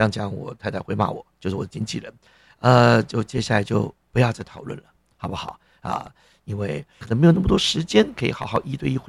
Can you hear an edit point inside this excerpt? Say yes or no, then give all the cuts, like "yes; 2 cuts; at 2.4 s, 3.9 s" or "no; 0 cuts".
no; 0 cuts